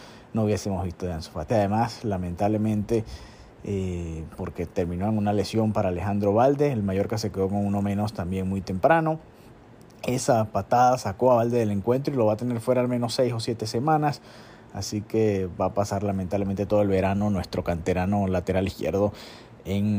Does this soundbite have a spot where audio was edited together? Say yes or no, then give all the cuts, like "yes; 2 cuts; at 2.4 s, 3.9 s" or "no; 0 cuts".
yes; 1 cut; at 1.5 s